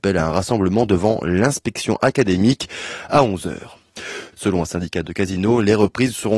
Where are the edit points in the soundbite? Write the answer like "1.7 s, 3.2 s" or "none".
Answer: 4.3 s